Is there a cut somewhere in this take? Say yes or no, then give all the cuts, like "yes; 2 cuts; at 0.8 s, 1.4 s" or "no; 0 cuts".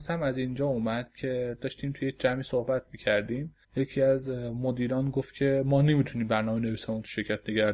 yes; 1 cut; at 3.6 s